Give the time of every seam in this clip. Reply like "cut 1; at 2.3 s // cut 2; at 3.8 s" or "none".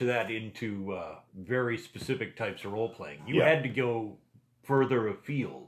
cut 1; at 1.3 s